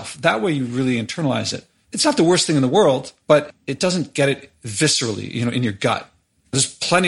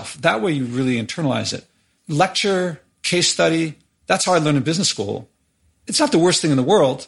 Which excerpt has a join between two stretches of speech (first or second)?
first